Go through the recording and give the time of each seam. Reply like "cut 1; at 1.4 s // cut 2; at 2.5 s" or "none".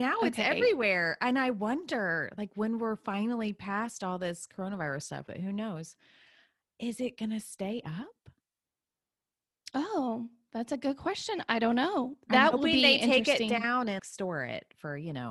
cut 1; at 5.3 s // cut 2; at 14.0 s